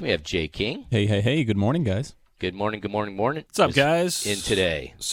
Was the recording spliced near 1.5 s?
no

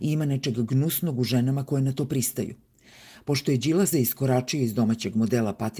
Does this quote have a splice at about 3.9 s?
yes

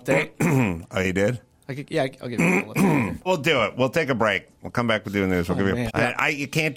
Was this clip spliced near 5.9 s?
yes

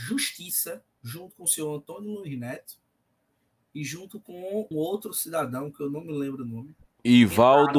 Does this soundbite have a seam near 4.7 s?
yes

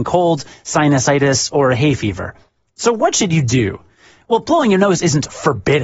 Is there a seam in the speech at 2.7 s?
yes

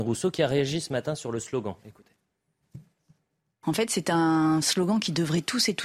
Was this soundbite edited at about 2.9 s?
no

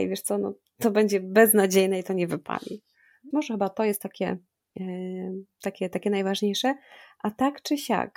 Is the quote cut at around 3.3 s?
yes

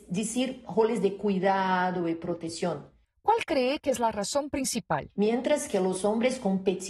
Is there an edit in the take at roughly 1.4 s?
no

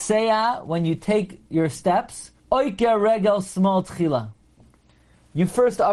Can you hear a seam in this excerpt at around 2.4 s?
yes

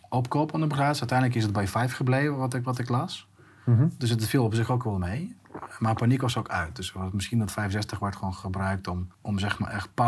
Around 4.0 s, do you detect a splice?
no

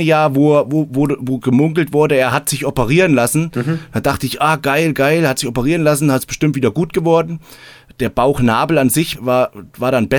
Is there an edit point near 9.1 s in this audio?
yes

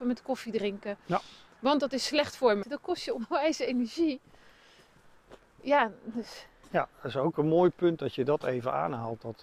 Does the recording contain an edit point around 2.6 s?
yes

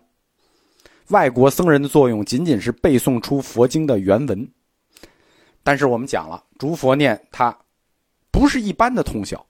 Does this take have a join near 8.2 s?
yes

